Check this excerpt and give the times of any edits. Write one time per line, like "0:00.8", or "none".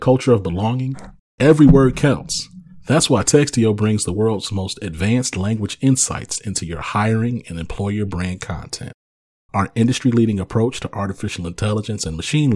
none